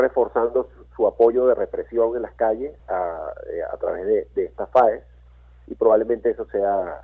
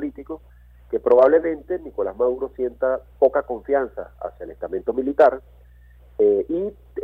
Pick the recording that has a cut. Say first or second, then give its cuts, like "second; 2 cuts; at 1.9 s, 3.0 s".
first; 1 cut; at 2.8 s